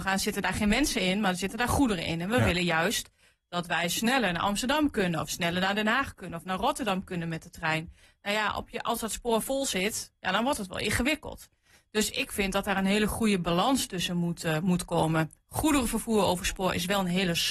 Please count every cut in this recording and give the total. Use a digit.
0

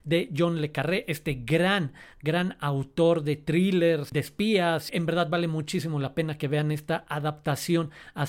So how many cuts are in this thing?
1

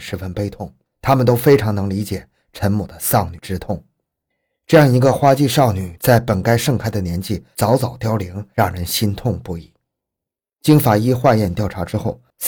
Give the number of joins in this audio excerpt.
0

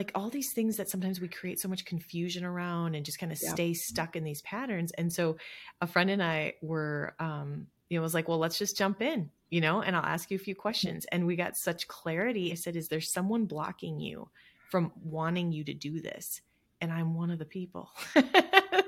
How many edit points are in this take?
2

